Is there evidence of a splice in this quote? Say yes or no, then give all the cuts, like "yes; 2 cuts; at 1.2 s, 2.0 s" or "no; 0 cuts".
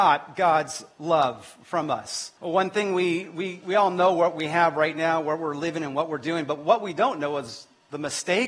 yes; 1 cut; at 2.4 s